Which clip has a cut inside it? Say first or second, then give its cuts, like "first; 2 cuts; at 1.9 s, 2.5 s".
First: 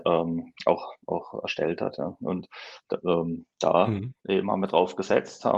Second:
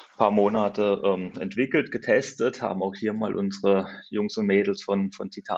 first; 1 cut; at 4.2 s